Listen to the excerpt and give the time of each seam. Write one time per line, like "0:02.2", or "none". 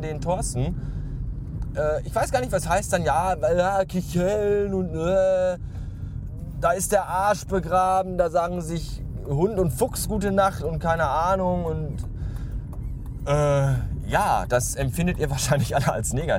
none